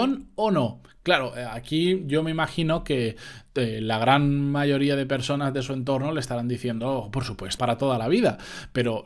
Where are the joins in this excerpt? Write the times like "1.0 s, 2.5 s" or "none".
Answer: 7.6 s